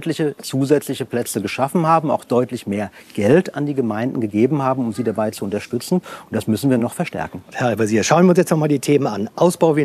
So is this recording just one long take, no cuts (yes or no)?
yes